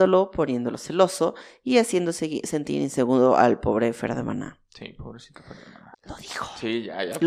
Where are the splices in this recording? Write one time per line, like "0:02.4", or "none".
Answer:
0:05.9